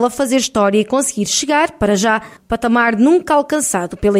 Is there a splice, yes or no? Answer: yes